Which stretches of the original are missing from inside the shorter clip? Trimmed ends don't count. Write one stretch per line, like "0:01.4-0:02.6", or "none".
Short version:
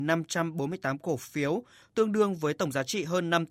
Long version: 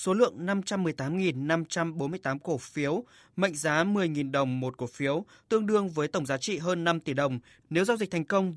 0:03.2-0:05.4